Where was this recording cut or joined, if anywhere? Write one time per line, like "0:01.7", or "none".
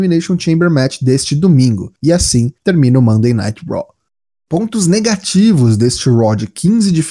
none